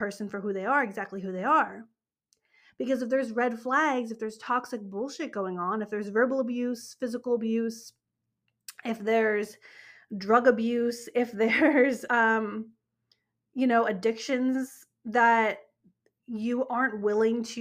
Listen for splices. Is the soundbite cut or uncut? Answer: uncut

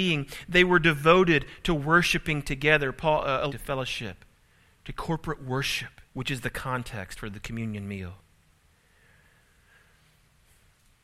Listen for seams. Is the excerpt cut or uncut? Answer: cut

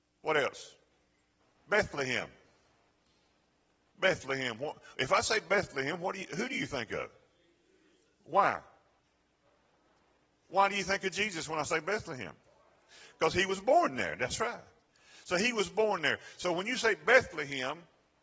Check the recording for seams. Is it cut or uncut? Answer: uncut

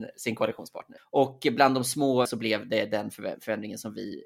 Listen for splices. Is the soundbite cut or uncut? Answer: cut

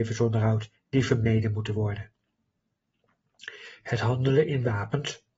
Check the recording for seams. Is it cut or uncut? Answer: uncut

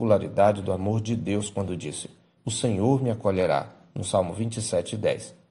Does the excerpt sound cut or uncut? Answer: cut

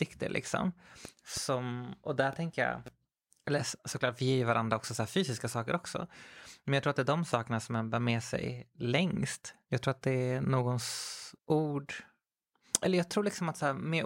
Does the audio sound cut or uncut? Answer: cut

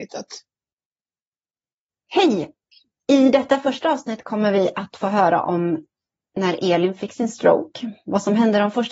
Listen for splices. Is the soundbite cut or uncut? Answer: uncut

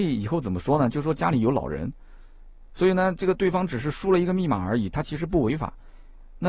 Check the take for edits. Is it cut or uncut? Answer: cut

